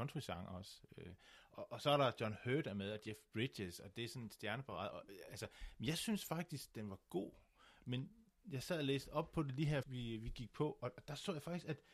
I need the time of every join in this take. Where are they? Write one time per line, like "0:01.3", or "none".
0:04.9
0:09.8